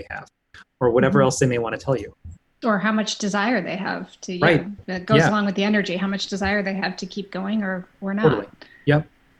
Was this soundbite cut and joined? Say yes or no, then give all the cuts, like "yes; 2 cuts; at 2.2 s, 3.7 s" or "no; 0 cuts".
no; 0 cuts